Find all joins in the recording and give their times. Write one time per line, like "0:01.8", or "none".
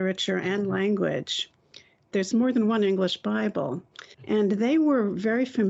0:02.1